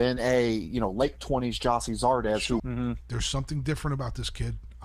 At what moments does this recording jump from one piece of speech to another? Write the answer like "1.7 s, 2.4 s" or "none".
2.6 s